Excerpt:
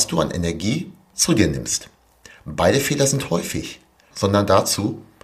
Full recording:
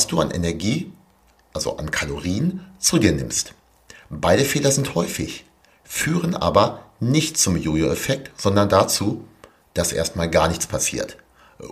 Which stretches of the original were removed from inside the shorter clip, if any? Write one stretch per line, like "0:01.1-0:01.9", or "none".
0:01.1-0:02.8
0:05.8-0:08.3